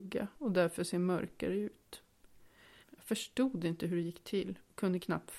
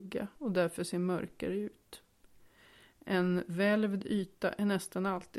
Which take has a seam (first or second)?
first